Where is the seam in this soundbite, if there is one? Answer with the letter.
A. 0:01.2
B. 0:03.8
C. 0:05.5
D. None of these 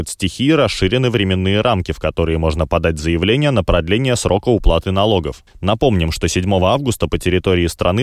C